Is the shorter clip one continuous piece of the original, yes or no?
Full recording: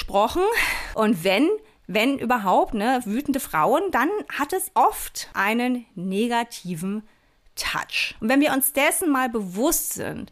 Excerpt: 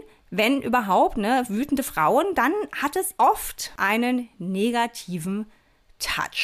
yes